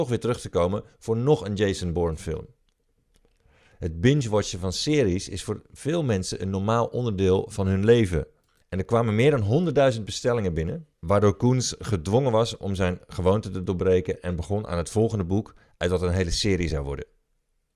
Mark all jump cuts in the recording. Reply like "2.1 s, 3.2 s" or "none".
8.6 s, 10.9 s